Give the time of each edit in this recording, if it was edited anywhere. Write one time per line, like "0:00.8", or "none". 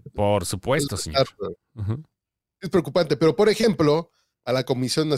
none